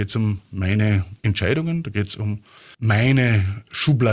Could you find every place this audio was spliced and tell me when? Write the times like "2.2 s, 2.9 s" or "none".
1.2 s, 2.7 s

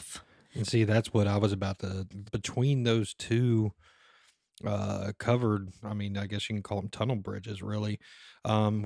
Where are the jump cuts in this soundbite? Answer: 2.3 s

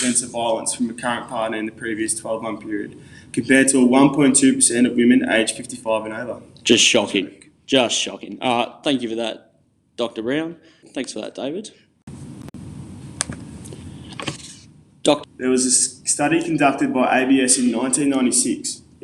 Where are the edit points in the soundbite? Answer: 10.8 s, 15.2 s

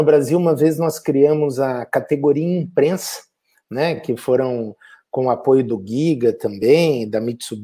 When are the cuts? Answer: none

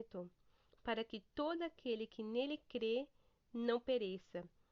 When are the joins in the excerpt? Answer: none

